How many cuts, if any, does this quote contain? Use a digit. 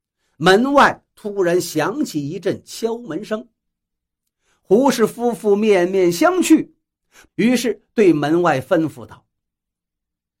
1